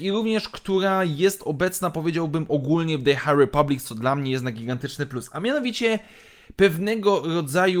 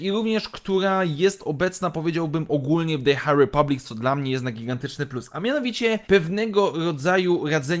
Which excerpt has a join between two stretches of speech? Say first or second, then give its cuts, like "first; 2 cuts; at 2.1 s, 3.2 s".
second; 1 cut; at 6.0 s